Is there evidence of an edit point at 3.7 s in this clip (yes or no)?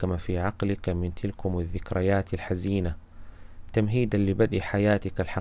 no